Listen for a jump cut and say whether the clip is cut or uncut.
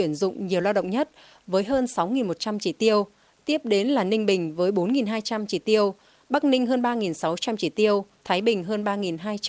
cut